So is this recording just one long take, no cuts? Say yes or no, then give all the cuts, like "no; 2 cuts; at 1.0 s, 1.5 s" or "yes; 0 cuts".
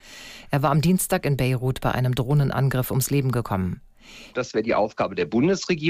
no; 1 cut; at 4.3 s